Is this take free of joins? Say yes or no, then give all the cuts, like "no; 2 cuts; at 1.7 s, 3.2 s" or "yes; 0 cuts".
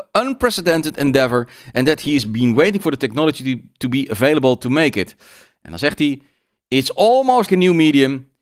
no; 1 cut; at 7.5 s